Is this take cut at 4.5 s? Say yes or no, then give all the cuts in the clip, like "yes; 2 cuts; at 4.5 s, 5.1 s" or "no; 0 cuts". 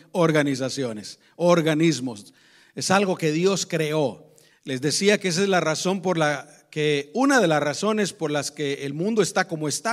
yes; 1 cut; at 4.5 s